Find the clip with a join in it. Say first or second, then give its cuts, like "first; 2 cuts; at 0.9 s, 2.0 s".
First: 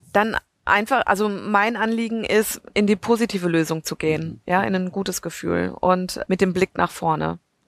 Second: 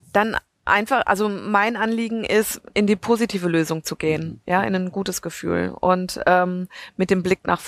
first; 1 cut; at 6.2 s